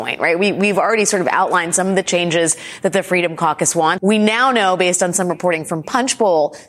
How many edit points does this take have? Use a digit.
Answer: 1